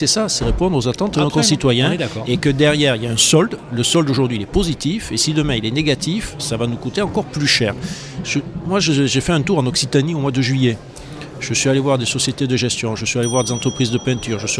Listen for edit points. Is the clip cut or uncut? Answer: uncut